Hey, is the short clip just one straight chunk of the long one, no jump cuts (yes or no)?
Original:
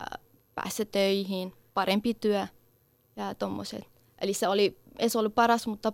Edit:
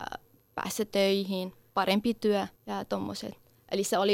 no